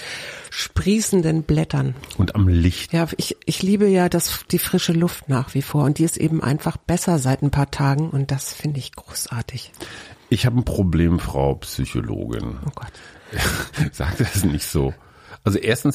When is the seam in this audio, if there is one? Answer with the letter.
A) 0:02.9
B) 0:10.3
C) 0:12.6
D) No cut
A